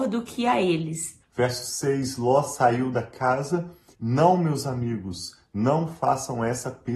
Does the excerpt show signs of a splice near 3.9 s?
yes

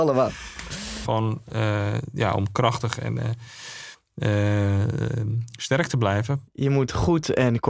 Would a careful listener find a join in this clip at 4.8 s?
no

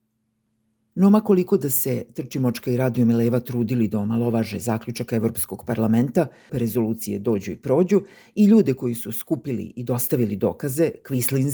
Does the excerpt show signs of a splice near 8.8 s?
no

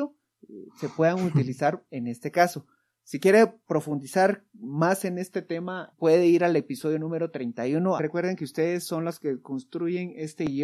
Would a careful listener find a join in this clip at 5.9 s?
yes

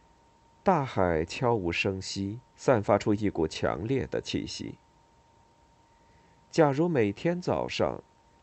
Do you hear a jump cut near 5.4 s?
no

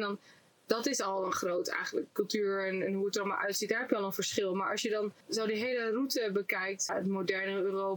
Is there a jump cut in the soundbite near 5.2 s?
yes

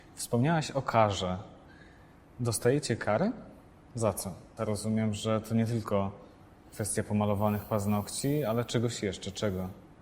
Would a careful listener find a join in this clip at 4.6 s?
yes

